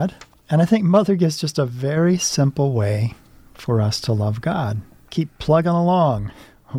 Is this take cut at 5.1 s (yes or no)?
yes